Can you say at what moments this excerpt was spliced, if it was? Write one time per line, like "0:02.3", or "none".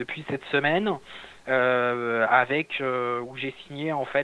none